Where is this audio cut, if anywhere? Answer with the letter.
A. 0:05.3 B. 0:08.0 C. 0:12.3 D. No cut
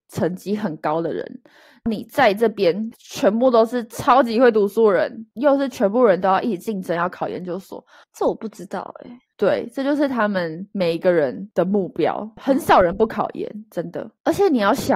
B